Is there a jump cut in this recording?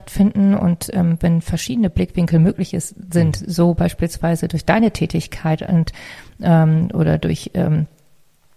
no; 0 cuts

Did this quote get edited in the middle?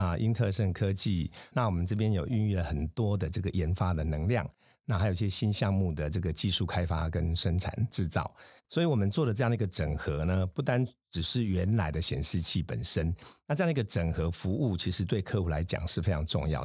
yes; 2 cuts; at 1.5 s, 8.6 s

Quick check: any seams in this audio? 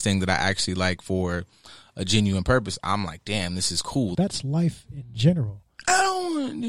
yes; 1 cut; at 4.1 s

